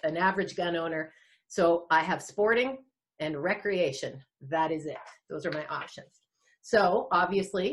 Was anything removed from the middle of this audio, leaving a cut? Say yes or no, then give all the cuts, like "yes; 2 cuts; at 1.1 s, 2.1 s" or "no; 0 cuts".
no; 0 cuts